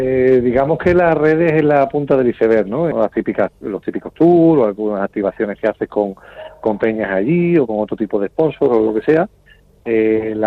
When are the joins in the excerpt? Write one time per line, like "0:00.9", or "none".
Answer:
0:02.9